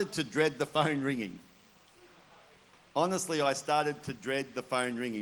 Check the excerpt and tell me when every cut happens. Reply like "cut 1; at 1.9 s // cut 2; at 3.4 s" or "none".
none